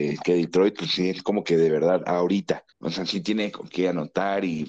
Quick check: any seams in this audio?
yes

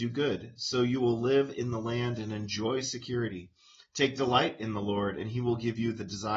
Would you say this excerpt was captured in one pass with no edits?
yes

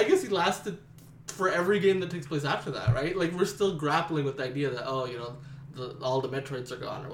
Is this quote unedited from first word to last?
yes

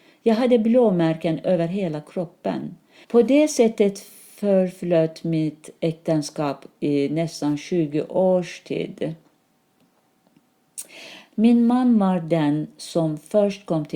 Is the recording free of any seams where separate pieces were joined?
no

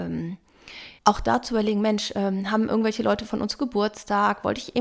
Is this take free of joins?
no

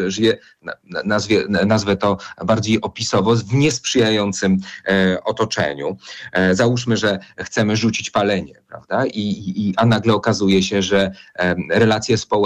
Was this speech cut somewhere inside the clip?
no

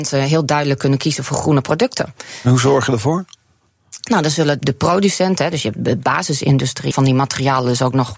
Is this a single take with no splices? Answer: no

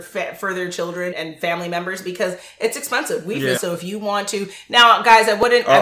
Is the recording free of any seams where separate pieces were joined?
no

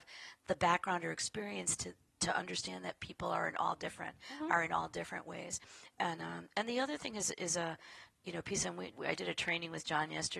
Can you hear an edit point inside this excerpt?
yes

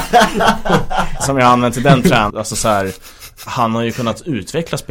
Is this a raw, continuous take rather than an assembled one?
no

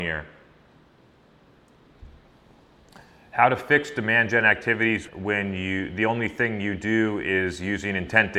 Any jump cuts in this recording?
yes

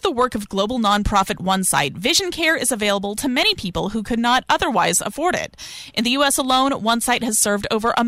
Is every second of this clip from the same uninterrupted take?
yes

